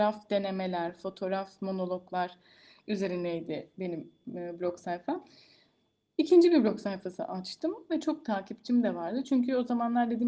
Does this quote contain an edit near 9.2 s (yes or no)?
no